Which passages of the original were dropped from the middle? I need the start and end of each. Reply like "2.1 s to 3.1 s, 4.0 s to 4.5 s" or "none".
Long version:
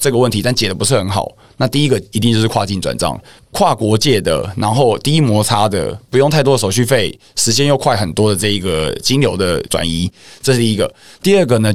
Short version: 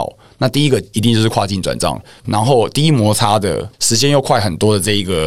3.4 s to 4.5 s, 6.0 s to 7.3 s

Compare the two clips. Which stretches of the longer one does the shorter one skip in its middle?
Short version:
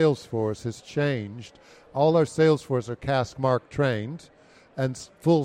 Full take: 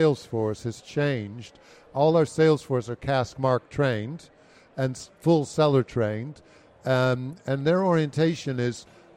none

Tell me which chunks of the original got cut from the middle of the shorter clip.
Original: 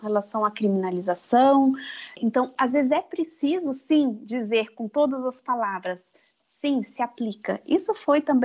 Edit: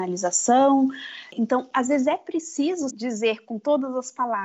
3.7 s to 4.2 s

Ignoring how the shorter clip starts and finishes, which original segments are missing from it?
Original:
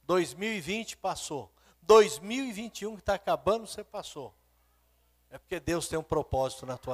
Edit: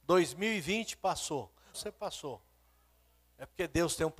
1.7 s to 3.7 s

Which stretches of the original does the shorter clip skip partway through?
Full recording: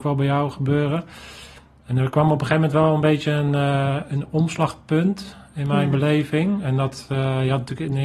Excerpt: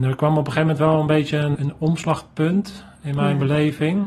3.5 s to 4.1 s

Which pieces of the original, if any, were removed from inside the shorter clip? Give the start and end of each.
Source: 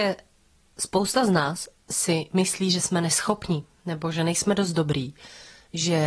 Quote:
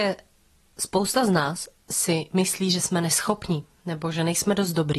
none

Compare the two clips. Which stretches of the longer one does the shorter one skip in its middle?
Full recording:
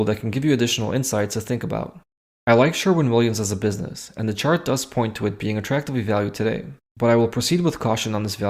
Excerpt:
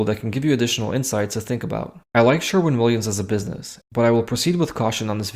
2.0 s to 2.4 s, 4.1 s to 6.9 s

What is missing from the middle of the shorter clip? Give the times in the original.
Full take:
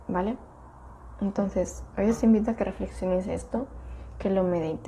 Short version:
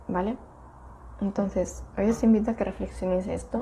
none

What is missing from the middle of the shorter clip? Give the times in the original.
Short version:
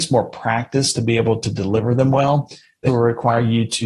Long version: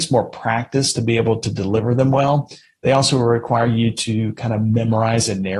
2.9 s to 3.1 s

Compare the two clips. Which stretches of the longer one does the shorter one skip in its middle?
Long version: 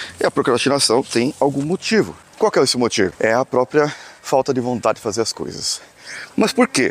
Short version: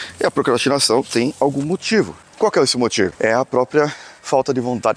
none

